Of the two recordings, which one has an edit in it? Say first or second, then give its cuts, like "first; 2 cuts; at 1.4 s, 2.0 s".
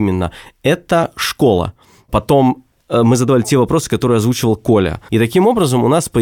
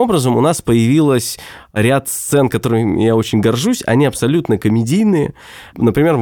first; 1 cut; at 5.1 s